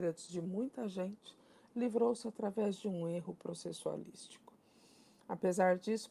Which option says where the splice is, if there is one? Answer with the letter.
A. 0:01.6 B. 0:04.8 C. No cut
C